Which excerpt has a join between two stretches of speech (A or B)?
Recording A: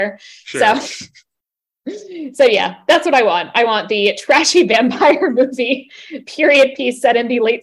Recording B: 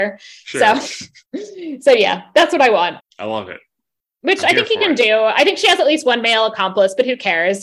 B